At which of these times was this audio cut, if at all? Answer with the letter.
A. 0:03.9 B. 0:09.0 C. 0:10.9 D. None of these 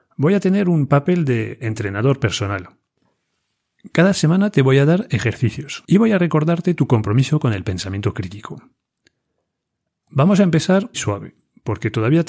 C